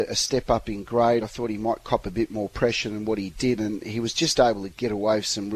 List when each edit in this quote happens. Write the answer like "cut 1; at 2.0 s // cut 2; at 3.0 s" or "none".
none